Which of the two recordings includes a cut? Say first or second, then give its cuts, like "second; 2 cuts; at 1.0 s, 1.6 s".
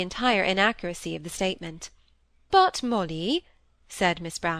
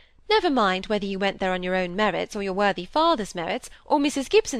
first; 1 cut; at 2.5 s